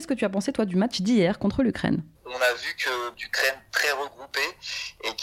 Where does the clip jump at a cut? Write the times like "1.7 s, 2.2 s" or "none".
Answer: 3.1 s